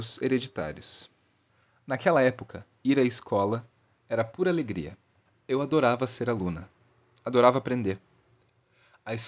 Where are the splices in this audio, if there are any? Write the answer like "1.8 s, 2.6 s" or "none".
none